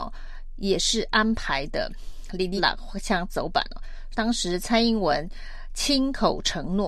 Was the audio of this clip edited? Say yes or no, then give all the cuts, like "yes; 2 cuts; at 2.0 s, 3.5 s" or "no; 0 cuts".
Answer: yes; 2 cuts; at 2.6 s, 4.1 s